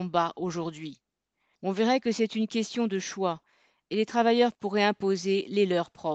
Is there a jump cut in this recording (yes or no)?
yes